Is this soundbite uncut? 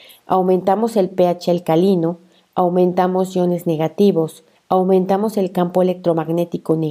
no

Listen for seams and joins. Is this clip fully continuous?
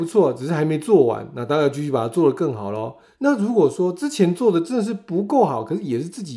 yes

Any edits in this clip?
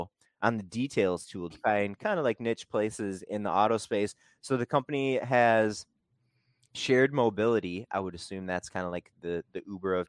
yes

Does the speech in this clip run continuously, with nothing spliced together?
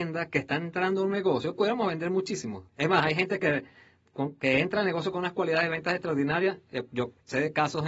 no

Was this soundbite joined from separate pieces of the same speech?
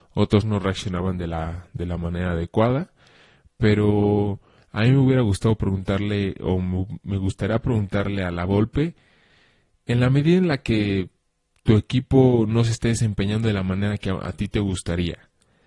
no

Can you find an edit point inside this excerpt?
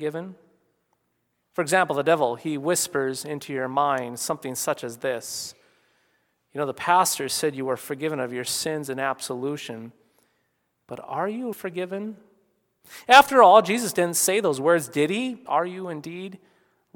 yes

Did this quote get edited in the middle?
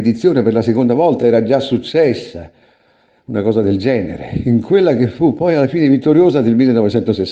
no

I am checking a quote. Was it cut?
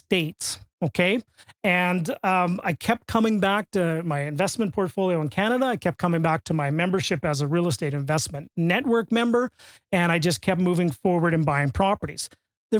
no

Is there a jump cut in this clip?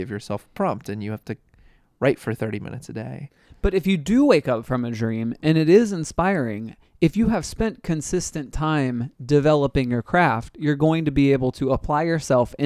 no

